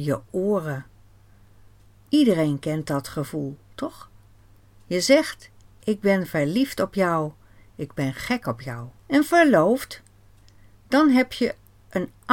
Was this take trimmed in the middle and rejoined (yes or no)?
yes